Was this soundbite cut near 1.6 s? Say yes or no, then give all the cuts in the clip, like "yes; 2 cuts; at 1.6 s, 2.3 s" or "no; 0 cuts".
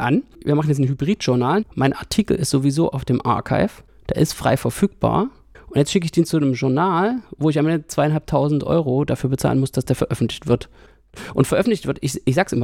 yes; 1 cut; at 1.6 s